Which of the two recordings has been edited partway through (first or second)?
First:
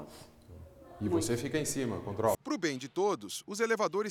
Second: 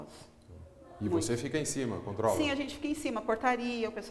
first